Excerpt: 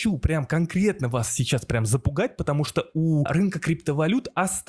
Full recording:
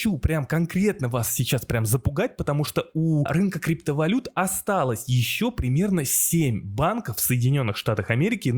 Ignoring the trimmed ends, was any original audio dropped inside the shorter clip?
no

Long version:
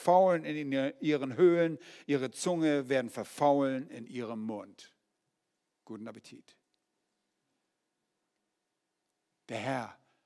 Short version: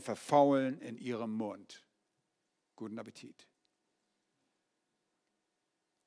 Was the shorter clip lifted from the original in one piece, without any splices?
yes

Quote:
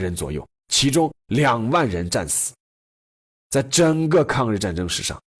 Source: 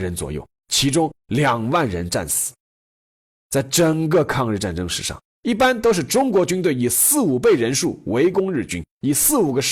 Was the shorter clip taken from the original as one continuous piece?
yes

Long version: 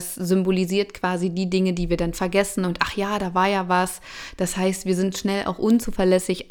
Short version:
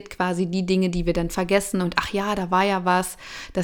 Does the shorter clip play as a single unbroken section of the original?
yes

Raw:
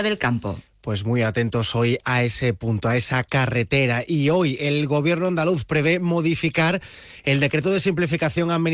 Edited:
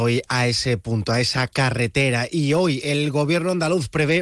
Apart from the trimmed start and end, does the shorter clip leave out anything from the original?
no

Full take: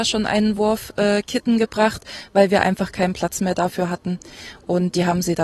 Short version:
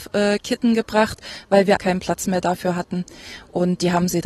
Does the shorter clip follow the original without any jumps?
no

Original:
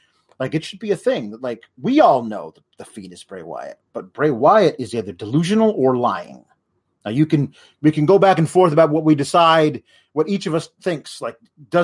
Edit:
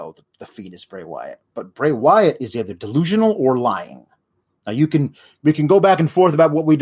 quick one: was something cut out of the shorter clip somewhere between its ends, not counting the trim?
no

